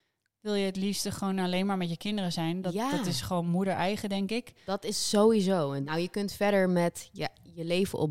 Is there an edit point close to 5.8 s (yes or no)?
yes